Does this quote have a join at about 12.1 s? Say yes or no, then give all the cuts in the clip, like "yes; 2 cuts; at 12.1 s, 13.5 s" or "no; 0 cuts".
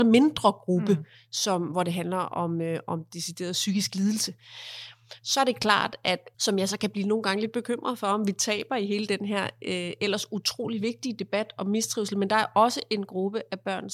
no; 1 cut; at 6.3 s